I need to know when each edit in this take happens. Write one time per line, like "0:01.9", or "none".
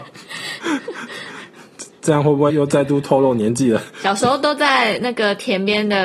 0:02.5